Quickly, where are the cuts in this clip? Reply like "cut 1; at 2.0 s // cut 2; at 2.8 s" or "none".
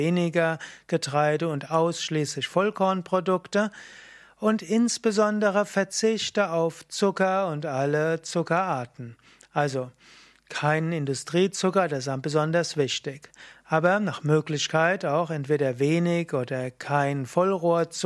none